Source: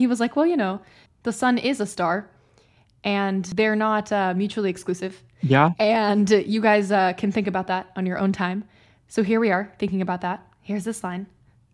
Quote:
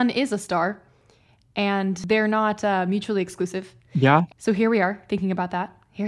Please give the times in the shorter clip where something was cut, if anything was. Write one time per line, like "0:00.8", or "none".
0:04.3